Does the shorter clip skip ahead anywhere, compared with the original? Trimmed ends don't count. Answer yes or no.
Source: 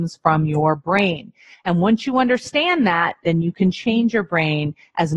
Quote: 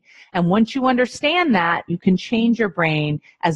yes